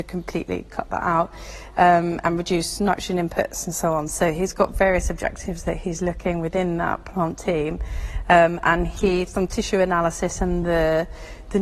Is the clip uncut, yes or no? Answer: yes